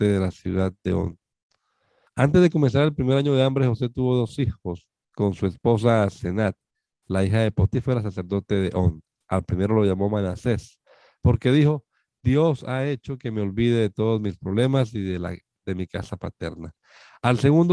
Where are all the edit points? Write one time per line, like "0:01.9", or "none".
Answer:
0:02.1